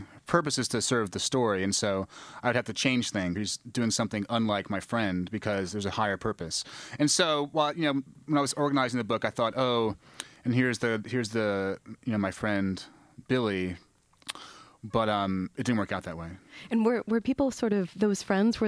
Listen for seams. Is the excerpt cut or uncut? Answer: cut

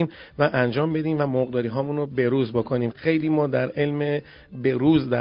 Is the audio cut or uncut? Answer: cut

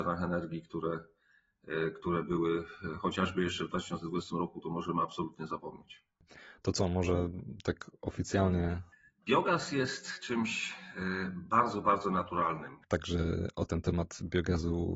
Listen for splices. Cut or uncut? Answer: cut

